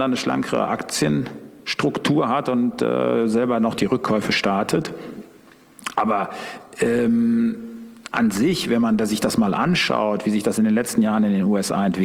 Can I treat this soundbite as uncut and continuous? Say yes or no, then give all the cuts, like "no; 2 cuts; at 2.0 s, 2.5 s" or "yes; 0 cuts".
yes; 0 cuts